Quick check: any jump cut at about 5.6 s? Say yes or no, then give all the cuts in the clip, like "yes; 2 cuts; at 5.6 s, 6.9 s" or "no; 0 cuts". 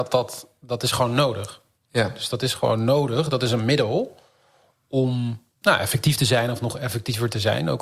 yes; 1 cut; at 5.6 s